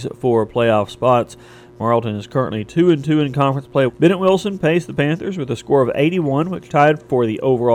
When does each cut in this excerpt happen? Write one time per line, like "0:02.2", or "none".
0:03.9